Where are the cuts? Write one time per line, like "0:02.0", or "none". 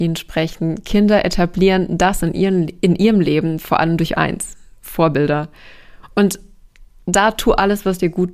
0:06.0